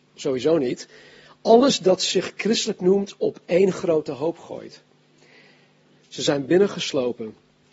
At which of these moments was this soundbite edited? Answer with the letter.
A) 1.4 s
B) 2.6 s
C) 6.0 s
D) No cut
C